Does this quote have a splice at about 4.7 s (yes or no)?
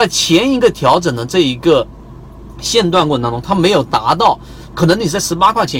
yes